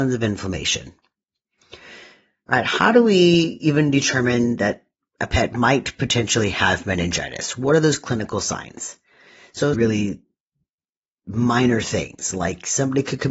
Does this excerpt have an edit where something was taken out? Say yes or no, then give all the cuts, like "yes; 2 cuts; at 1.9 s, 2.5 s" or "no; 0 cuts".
yes; 1 cut; at 9.7 s